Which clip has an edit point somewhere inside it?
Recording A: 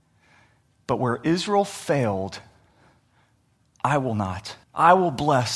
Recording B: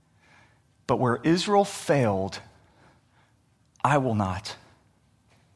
A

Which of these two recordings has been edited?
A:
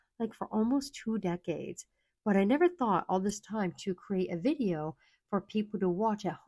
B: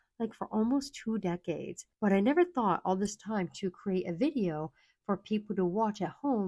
B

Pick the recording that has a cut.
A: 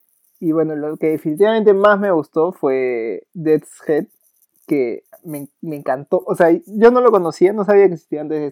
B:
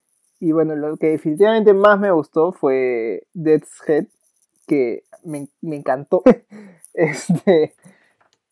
B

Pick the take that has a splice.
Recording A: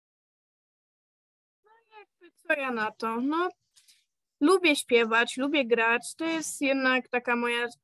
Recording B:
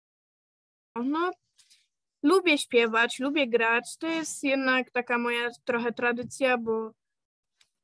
B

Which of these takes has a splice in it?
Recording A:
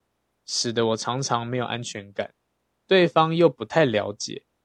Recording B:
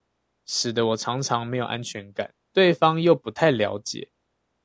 B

